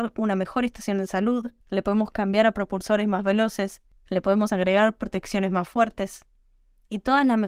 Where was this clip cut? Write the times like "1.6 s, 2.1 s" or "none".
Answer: 1.6 s